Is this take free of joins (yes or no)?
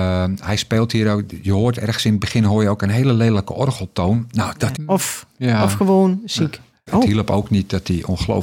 no